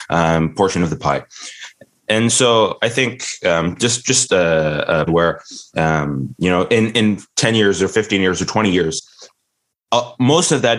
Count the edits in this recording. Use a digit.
1